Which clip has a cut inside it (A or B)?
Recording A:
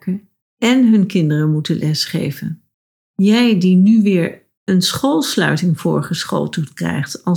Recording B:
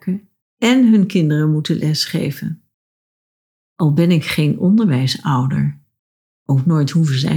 A